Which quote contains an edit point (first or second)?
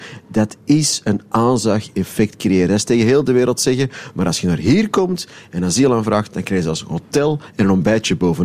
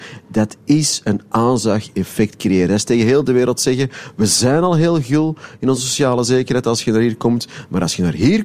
first